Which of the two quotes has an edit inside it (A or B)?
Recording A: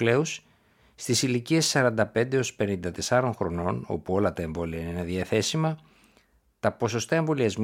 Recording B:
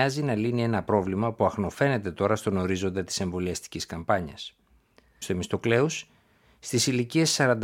B